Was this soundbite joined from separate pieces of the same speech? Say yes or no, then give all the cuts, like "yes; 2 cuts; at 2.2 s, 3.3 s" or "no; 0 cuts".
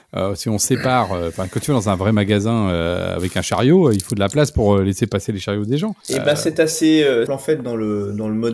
yes; 2 cuts; at 6.0 s, 7.3 s